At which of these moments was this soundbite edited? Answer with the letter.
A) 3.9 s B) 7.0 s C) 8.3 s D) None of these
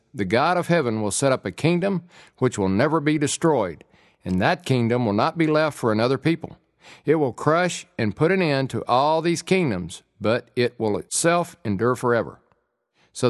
D